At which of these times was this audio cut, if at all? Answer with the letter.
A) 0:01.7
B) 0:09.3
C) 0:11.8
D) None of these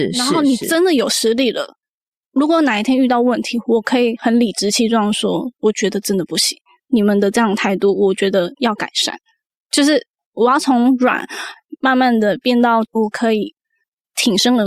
D